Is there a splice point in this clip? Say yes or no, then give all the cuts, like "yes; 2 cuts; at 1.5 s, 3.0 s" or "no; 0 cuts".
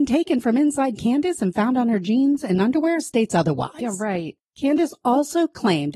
no; 0 cuts